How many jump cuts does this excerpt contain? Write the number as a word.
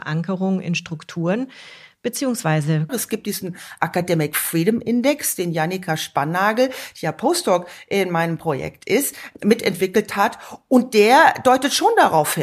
one